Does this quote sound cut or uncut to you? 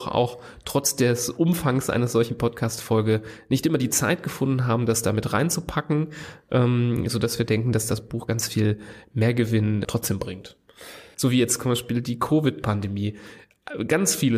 cut